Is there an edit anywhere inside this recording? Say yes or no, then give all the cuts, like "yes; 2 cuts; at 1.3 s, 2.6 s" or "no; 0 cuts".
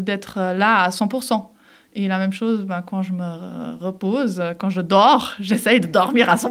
no; 0 cuts